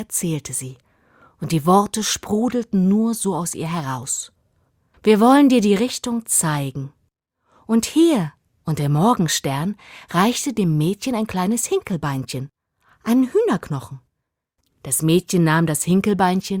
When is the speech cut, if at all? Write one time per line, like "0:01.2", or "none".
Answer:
0:04.9
0:08.6
0:14.6